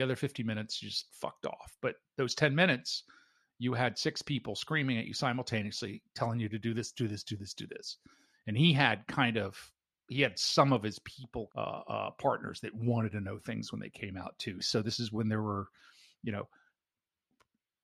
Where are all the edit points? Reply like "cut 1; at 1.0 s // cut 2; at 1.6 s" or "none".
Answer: cut 1; at 11.5 s // cut 2; at 14.6 s